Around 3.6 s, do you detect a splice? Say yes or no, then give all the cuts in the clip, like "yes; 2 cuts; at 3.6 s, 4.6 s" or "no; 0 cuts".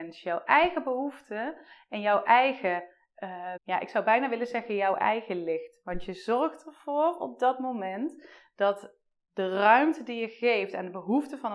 yes; 1 cut; at 3.6 s